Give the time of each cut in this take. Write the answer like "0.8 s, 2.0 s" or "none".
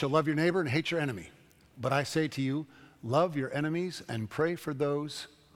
none